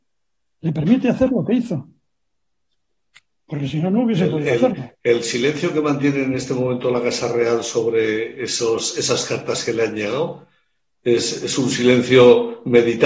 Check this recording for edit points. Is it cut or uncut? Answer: uncut